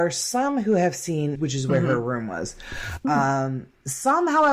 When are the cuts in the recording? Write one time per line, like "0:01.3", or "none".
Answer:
0:01.4
0:03.0